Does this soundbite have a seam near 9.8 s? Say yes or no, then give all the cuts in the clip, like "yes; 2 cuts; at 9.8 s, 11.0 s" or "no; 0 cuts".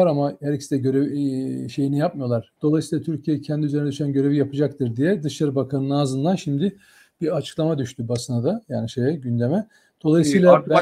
no; 1 cut; at 2.6 s